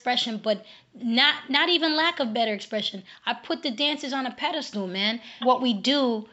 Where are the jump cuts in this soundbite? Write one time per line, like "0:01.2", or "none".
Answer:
0:05.4